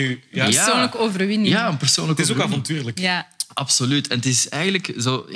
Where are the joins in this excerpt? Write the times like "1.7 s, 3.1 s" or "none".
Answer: none